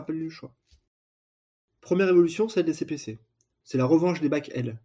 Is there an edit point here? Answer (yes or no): yes